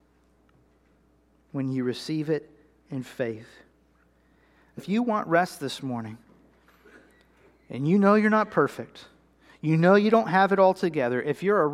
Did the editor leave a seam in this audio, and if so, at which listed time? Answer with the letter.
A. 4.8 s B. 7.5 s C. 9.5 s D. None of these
A